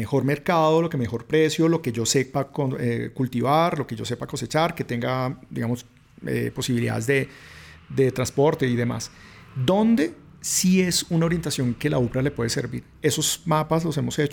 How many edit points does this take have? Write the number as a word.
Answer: zero